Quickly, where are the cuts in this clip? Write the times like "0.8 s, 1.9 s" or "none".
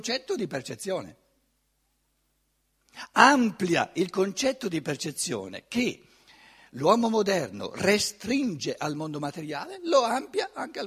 none